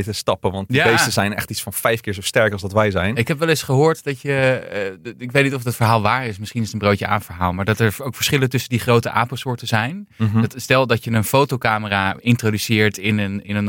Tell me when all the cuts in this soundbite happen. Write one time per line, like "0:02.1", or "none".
none